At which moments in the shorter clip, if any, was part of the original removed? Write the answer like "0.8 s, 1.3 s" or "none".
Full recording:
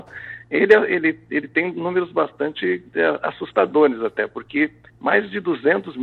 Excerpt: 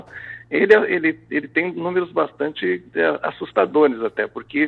none

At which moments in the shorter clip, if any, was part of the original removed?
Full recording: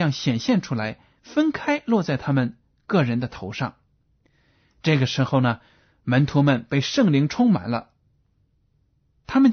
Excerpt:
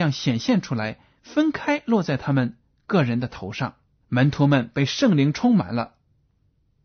4.0 s

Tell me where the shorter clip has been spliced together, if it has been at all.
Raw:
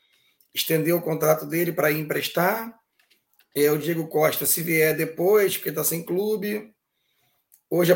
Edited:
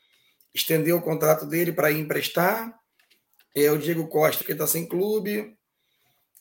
4.4 s

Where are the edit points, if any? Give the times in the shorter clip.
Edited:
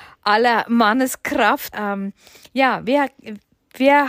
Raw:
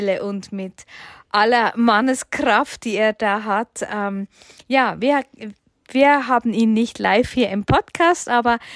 1.7 s

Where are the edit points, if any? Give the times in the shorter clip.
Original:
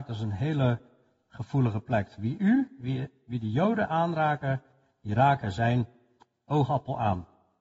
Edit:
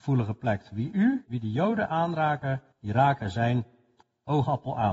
1.2 s, 2.7 s

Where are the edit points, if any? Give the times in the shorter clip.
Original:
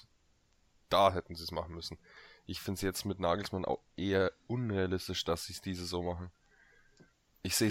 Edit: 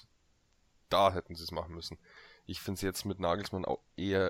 none

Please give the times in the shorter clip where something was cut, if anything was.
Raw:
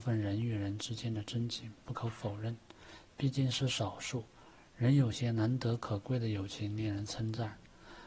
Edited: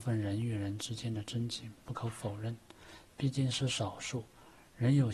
none

